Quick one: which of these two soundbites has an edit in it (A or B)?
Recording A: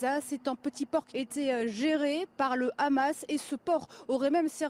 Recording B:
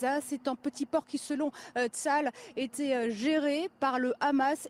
A